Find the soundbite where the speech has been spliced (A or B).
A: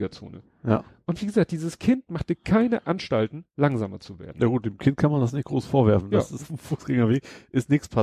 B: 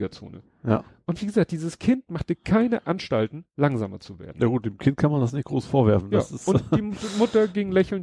A